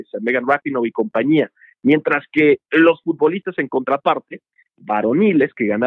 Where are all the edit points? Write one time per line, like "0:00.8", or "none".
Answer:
none